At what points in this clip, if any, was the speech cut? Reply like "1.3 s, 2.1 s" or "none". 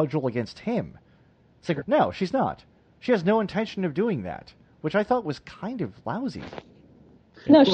1.8 s

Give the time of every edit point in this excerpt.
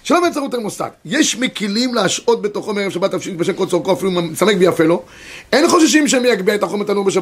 none

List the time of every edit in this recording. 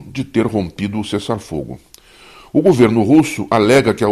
none

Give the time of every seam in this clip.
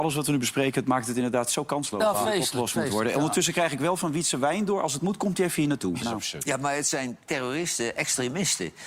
6.0 s

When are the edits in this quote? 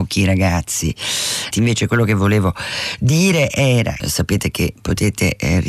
1.5 s, 4.0 s

